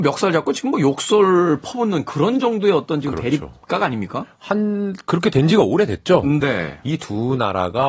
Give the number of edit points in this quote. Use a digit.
1